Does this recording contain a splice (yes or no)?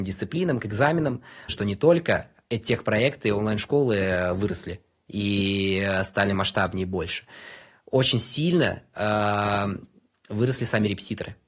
yes